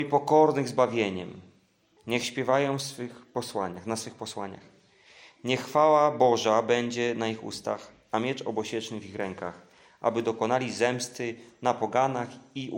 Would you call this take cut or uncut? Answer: cut